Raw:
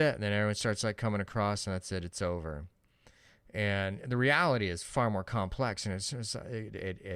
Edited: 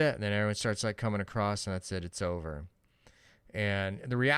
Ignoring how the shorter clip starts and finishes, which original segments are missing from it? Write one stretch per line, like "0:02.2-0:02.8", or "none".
none